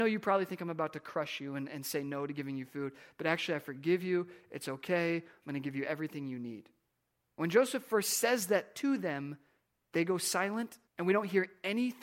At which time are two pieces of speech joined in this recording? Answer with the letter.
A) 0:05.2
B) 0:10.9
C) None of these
B